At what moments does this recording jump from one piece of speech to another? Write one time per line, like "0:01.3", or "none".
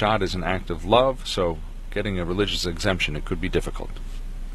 none